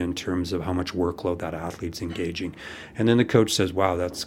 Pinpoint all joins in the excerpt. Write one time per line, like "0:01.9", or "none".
none

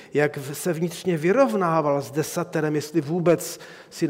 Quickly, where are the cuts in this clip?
none

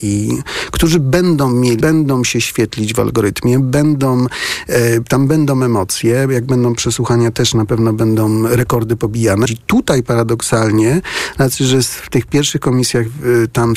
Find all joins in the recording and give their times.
0:01.8
0:09.5

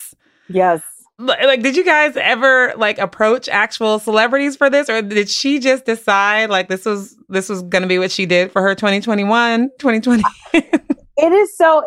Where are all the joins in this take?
none

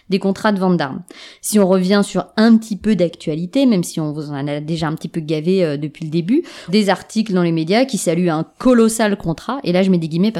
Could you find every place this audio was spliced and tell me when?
0:06.7

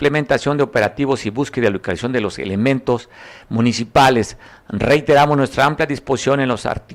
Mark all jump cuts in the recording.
none

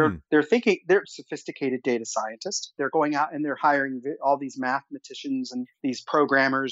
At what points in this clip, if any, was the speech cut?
0:01.0

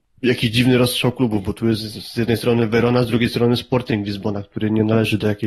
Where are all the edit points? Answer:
none

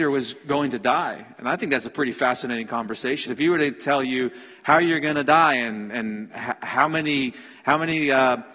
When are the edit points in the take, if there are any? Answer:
0:03.3

